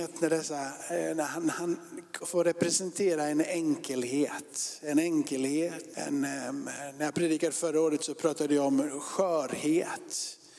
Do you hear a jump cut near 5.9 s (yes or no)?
yes